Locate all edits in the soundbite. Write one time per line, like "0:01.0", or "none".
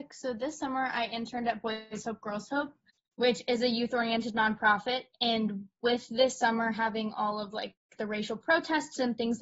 none